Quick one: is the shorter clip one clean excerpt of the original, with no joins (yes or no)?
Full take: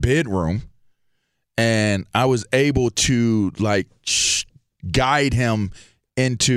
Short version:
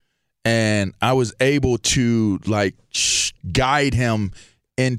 no